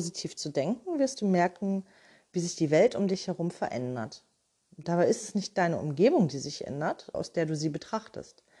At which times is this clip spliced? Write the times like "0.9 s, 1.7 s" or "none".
7.1 s